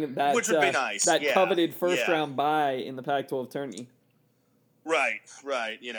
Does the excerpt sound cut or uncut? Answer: uncut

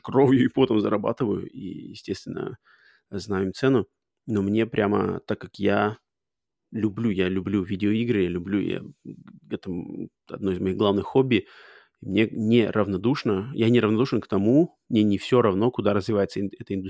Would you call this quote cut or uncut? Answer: uncut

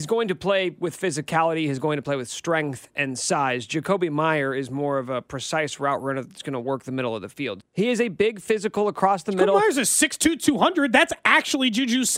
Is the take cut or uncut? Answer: cut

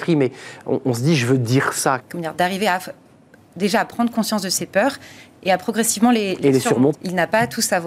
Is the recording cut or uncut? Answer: cut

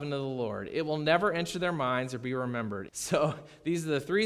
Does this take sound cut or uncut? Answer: cut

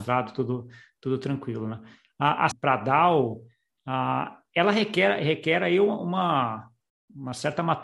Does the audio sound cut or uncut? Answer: cut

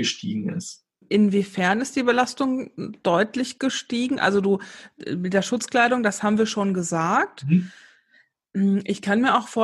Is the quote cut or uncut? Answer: uncut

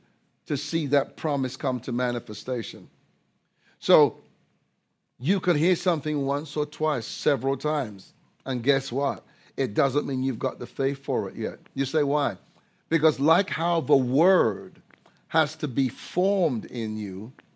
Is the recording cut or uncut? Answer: uncut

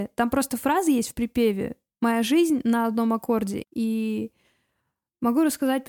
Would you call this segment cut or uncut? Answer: cut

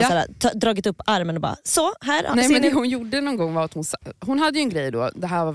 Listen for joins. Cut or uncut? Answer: uncut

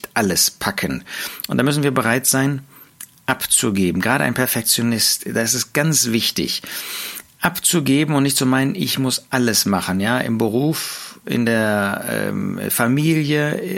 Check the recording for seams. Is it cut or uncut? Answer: uncut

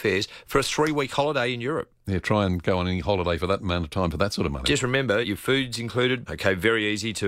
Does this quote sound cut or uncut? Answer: cut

